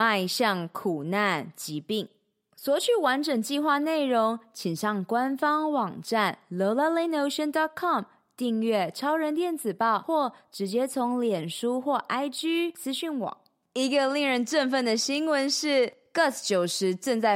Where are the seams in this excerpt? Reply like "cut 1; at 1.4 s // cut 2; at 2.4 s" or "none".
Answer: none